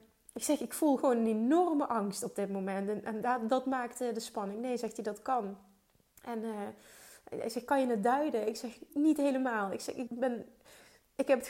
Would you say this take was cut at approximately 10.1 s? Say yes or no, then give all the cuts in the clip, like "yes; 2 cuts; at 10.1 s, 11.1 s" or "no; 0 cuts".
yes; 2 cuts; at 8.9 s, 10.1 s